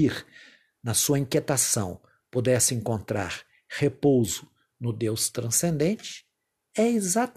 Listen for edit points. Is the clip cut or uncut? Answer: uncut